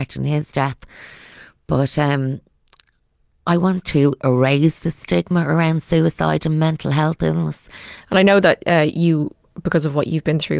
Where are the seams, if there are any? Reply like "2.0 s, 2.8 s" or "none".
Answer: 8.0 s